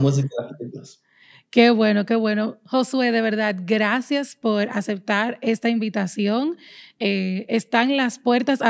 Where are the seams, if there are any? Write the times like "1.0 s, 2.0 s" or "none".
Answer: none